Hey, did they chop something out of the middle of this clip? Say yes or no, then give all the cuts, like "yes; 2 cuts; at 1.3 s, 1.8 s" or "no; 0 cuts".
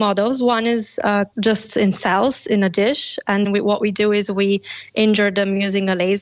yes; 1 cut; at 3.4 s